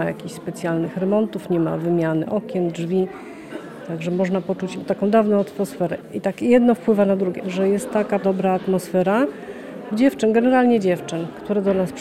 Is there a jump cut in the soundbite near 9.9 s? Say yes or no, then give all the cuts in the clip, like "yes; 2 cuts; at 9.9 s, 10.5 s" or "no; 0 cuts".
yes; 2 cuts; at 7.4 s, 9.9 s